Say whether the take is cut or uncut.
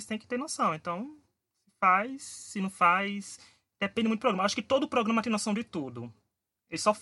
uncut